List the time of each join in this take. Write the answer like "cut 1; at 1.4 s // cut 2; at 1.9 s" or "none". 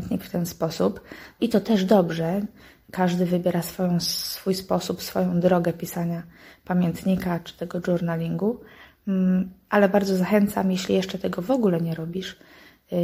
cut 1; at 1.4 s